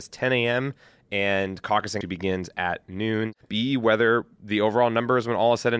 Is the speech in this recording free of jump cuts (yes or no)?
no